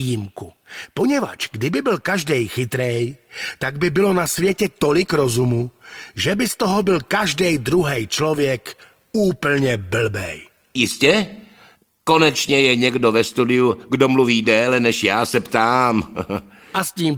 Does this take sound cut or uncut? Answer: uncut